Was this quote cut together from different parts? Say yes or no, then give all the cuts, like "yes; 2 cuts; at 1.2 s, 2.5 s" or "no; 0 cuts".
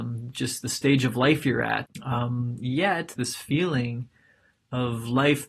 yes; 2 cuts; at 1.9 s, 3.2 s